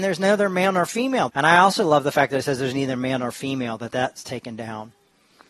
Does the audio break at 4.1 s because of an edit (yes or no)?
no